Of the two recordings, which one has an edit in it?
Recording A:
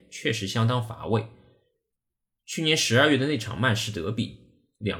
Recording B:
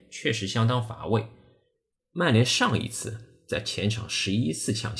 B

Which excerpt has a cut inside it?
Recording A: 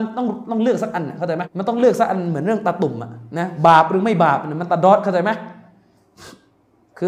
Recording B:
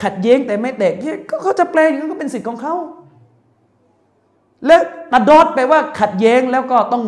A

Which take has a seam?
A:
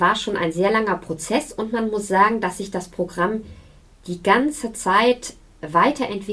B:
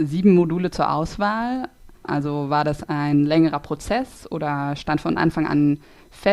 B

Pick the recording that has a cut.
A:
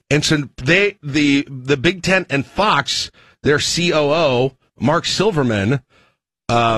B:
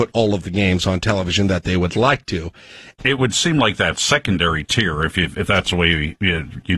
B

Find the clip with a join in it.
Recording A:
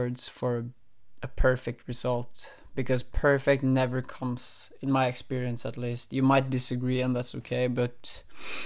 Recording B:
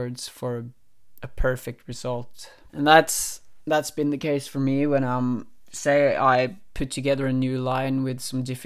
B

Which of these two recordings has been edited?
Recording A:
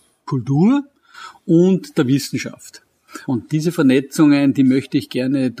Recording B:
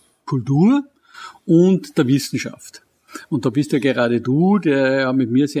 A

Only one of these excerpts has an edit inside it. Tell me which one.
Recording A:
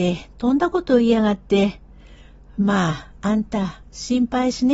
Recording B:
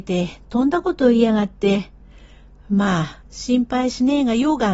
B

